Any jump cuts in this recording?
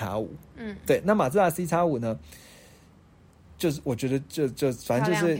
no; 0 cuts

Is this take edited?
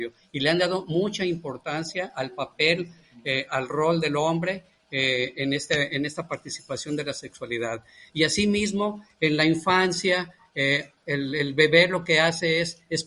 yes; 1 cut; at 5.3 s

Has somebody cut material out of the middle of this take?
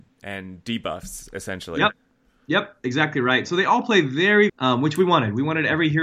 yes; 1 cut; at 4.5 s

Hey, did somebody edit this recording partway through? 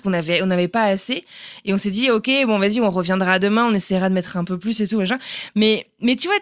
no; 0 cuts

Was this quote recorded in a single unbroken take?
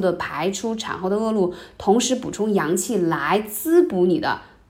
yes; 0 cuts

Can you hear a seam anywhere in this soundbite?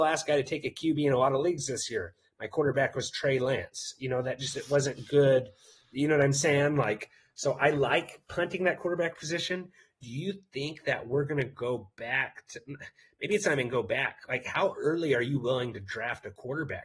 no; 0 cuts

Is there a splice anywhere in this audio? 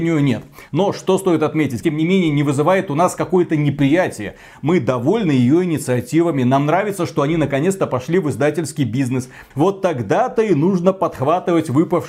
yes; 2 cuts; at 1.8 s, 9.5 s

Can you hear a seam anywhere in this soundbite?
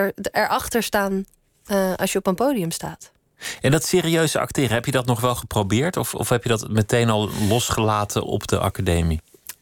no; 0 cuts

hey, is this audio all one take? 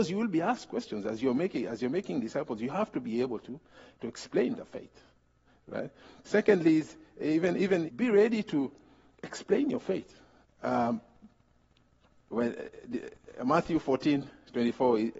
no; 2 cuts; at 7.9 s, 10.4 s

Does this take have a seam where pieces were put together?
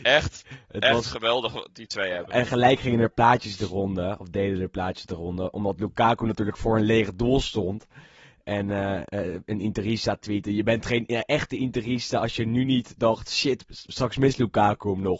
no; 0 cuts

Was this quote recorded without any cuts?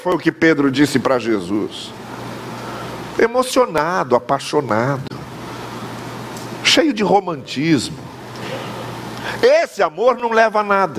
yes; 0 cuts

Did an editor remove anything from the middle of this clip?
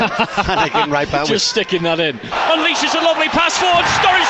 yes; 1 cut; at 2.3 s

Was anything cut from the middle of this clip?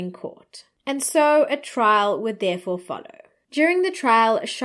no; 0 cuts

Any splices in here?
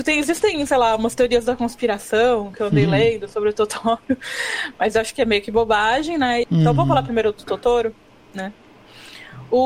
yes; 1 cut; at 6.4 s

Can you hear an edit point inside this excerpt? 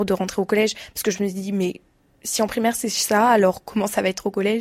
no; 0 cuts

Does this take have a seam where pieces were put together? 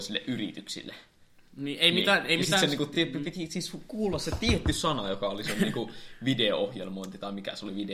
no; 0 cuts

